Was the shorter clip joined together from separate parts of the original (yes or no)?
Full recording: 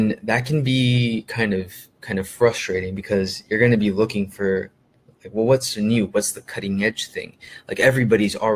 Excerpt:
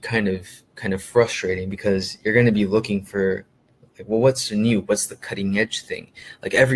no